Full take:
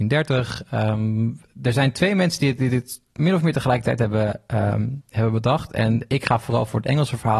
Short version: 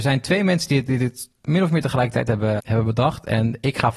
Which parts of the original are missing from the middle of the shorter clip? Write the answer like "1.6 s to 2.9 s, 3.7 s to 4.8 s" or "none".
4.3 s to 5.1 s